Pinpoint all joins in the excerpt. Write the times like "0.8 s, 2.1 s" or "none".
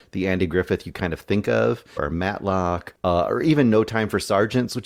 2.0 s